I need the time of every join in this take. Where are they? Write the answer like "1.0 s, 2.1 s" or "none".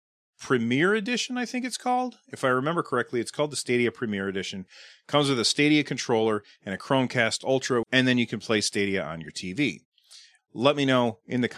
7.8 s, 10.4 s